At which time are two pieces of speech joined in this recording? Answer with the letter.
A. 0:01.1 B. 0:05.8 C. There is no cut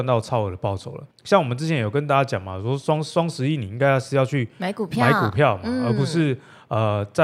A